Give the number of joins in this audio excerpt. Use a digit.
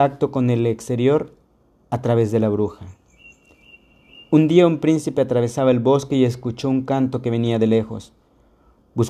0